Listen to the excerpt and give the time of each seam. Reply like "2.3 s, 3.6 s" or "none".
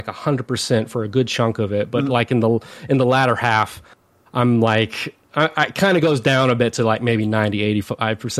none